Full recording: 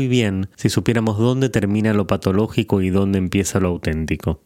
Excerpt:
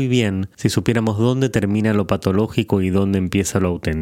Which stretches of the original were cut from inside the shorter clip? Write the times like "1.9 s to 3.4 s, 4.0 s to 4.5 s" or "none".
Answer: none

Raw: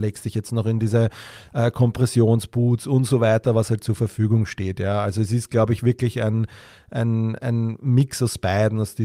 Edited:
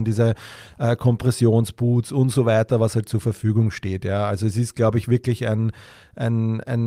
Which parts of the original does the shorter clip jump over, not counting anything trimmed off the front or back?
none

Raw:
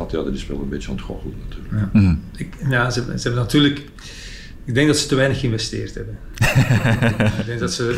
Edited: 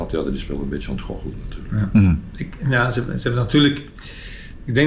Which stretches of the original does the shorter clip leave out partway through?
none

